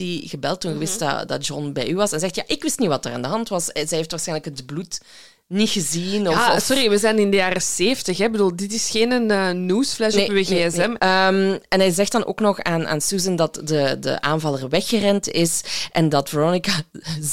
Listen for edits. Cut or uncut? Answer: cut